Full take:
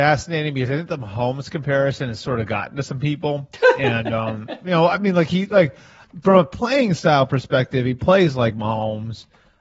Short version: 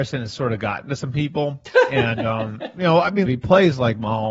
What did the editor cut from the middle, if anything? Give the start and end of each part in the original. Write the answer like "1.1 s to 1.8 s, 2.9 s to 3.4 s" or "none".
5.1 s to 7.8 s

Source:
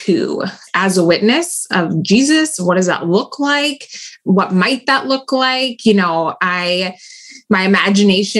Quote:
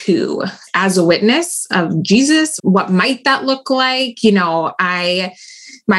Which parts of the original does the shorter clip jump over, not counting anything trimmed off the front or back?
2.6 s to 4.2 s

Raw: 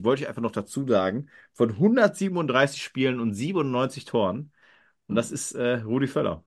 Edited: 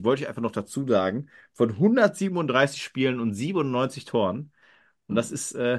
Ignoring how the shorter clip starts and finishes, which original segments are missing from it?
none

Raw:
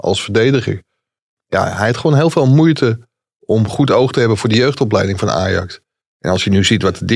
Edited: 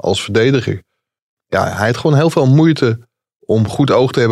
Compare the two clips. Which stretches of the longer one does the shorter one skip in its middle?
none

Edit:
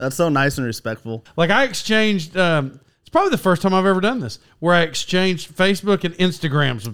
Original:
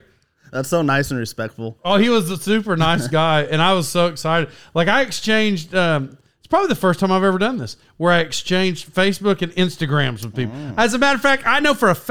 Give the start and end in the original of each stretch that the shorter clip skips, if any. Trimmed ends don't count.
1.8 s to 4.6 s

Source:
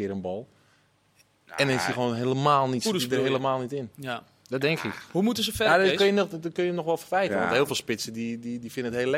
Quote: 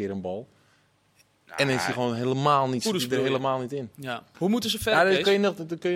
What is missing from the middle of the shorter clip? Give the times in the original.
4.3 s to 5.1 s

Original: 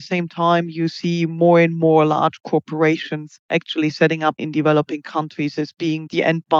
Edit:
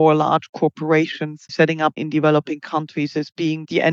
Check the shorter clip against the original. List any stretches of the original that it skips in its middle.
3.4 s to 3.9 s

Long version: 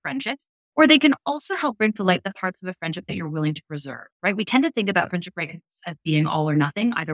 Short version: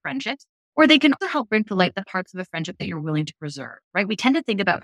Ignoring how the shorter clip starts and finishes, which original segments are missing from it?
1.2 s to 1.5 s

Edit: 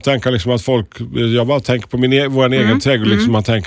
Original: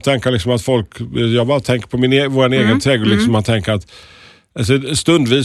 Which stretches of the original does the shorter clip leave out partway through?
none

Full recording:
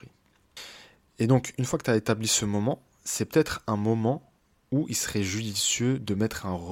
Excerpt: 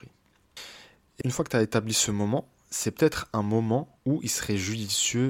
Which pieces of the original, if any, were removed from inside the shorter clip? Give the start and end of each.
1.2 s to 1.5 s, 4.3 s to 4.6 s

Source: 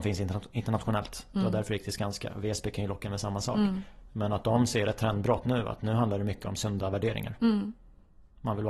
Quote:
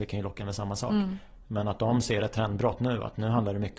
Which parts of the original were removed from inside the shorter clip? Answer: none

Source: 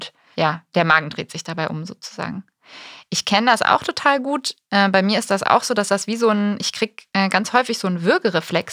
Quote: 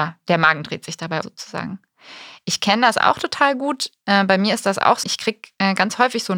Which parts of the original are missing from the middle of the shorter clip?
1.7 s to 1.9 s, 5.7 s to 6.6 s

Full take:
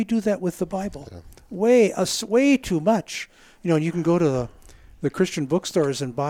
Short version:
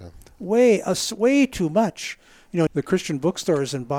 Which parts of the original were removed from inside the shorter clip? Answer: 3.8 s to 4.9 s

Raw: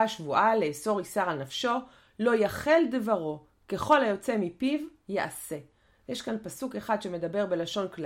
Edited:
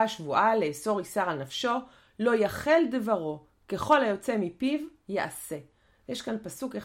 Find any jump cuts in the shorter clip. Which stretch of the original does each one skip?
none

